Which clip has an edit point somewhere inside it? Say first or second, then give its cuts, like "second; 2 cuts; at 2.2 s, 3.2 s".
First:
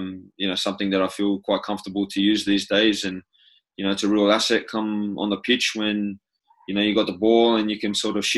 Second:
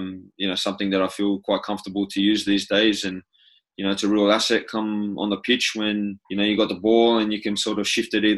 second; 1 cut; at 6.2 s